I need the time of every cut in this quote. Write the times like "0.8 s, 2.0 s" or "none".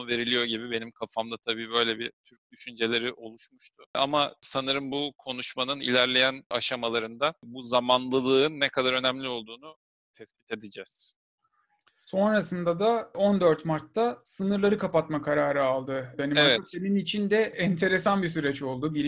none